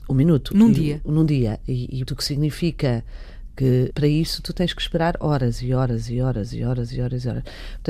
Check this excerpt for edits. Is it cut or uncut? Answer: cut